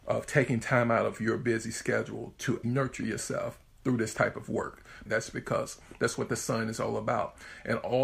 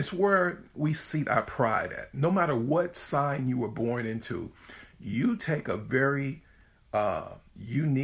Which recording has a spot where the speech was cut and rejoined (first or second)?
first